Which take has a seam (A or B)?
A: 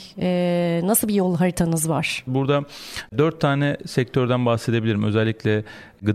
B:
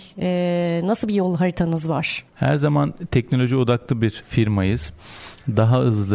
A